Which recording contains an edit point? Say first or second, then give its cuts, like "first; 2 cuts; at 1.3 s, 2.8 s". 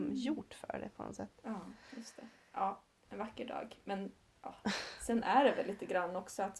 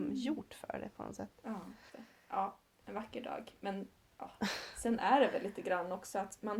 second; 1 cut; at 1.9 s